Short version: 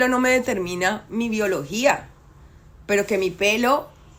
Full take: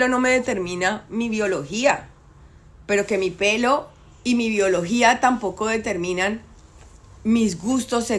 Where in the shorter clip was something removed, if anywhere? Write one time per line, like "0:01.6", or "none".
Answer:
none